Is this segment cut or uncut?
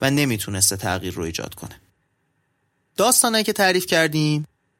uncut